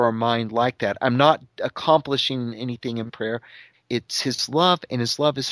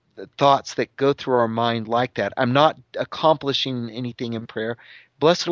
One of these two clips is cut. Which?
first; 1 cut; at 3.7 s

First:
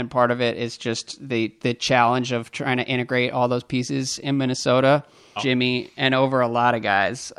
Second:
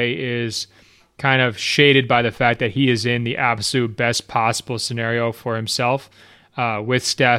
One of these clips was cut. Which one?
first; 1 cut; at 5.4 s

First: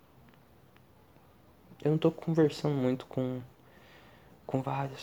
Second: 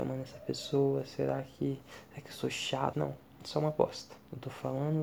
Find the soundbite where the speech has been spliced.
second; 1 cut; at 2.9 s

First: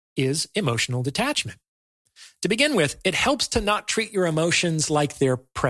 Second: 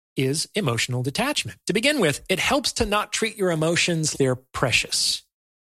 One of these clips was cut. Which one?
second; 2 cuts; at 1.6 s, 4.1 s

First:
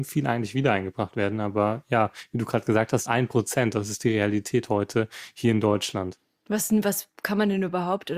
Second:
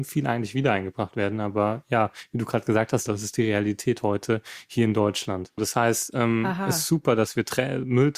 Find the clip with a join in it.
second; 2 cuts; at 3.1 s, 5.6 s

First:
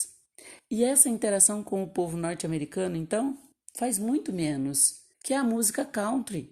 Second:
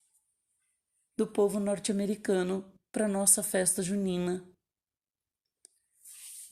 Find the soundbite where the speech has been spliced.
first; 1 cut; at 5.1 s

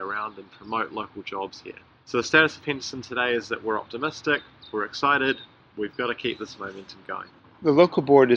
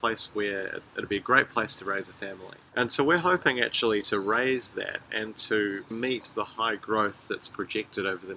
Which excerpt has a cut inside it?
second; 2 cuts; at 2.7 s, 5.9 s

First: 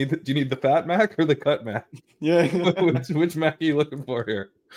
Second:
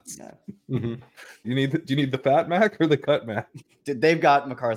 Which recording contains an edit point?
second; 2 cuts; at 1.4 s, 3.8 s

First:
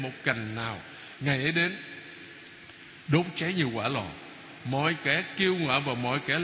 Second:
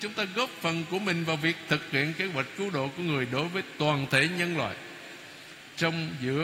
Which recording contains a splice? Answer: first; 1 cut; at 1.2 s

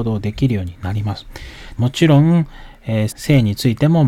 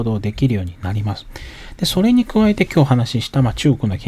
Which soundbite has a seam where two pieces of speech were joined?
first; 2 cuts; at 1.8 s, 3.1 s

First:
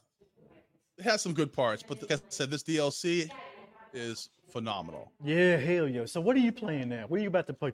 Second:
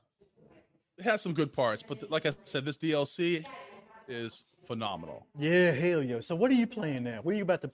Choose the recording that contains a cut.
first; 1 cut; at 2.1 s

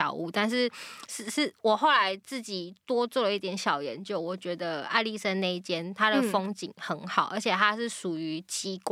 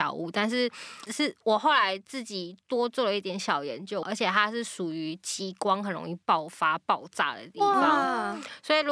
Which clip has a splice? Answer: second; 2 cuts; at 1.1 s, 4.0 s

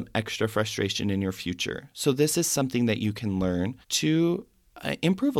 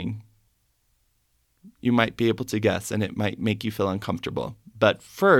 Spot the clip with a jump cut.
first; 1 cut; at 3.8 s

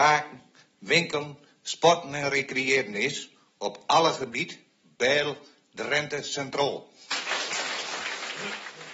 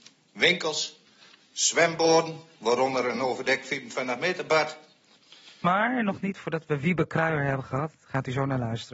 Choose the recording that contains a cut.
second; 1 cut; at 5.6 s

